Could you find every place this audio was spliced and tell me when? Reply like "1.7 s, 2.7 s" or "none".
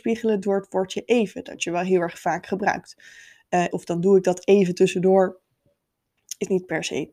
3.7 s

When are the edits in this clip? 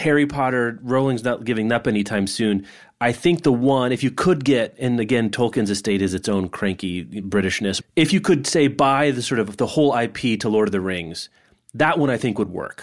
7.8 s

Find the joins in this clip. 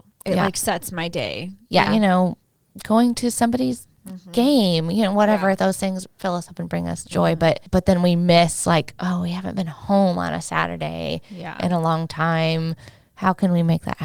1.9 s

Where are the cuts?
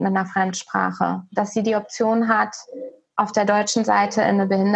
none

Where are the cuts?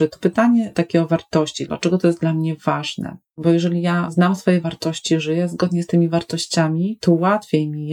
1.7 s

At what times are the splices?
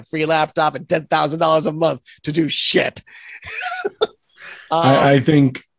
none

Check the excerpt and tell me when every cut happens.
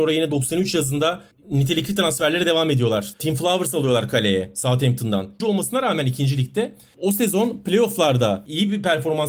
3.1 s, 5.4 s

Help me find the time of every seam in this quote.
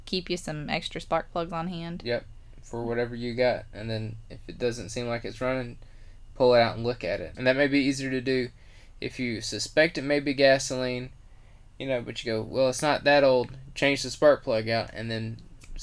7.3 s

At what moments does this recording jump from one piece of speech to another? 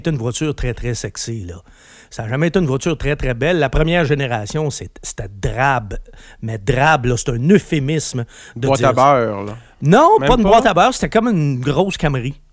none

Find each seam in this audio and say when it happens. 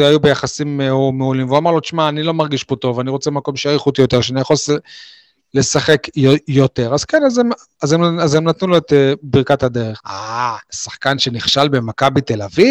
10.0 s

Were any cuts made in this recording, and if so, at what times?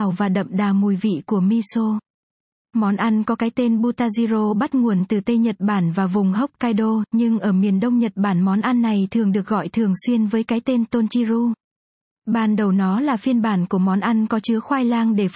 none

